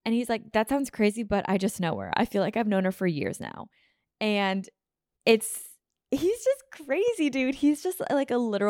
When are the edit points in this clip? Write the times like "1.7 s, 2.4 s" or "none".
none